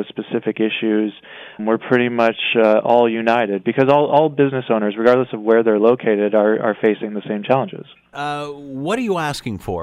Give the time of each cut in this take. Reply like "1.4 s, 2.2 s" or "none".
1.6 s, 8.1 s